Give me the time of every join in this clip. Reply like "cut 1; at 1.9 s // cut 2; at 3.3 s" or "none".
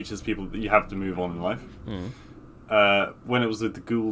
none